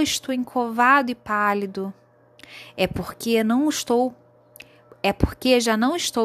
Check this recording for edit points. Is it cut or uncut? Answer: uncut